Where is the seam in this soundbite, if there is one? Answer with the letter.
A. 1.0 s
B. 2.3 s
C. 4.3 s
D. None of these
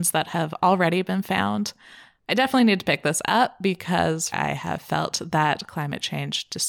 C